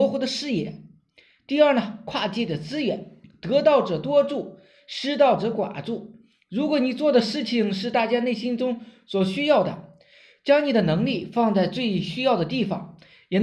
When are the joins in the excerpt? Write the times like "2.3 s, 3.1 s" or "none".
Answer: none